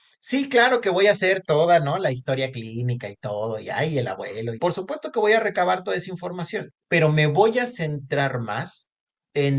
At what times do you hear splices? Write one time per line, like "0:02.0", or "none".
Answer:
0:04.5
0:06.8

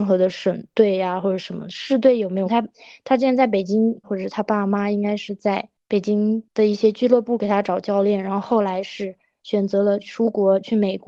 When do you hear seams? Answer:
0:02.4
0:04.0

